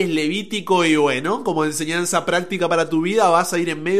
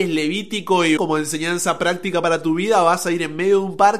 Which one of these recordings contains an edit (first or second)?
second